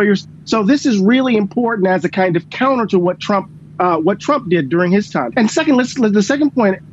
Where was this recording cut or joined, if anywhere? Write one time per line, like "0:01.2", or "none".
0:05.3